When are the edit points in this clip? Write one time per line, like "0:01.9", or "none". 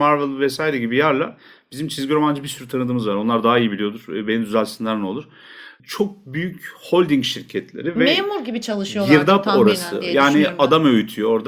none